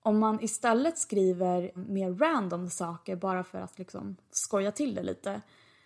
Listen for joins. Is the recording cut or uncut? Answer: cut